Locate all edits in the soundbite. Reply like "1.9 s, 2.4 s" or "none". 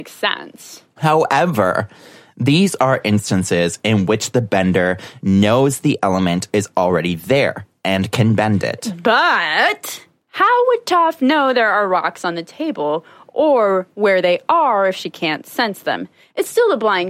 none